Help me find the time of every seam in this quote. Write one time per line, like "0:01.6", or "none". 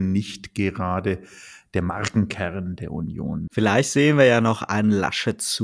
0:03.5